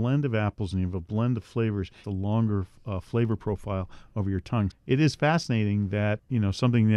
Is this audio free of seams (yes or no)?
no